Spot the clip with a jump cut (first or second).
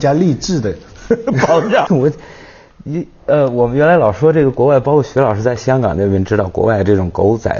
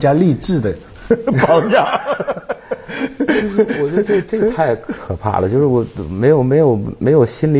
first